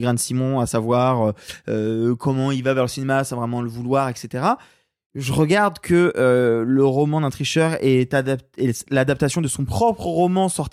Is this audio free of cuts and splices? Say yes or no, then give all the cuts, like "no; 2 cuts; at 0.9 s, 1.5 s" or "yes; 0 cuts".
yes; 0 cuts